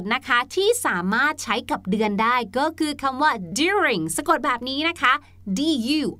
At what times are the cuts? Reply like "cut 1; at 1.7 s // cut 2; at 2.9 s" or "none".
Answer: cut 1; at 3.5 s